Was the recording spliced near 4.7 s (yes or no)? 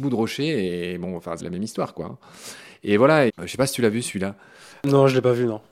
no